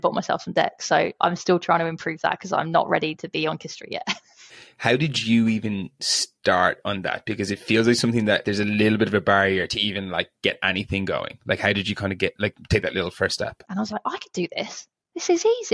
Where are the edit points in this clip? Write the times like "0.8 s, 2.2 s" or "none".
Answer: 8.4 s, 13.6 s